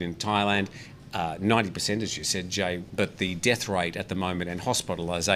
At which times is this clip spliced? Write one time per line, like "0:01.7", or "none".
0:02.9